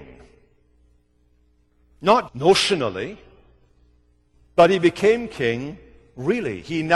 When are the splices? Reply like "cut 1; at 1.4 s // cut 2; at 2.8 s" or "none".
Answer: cut 1; at 2.3 s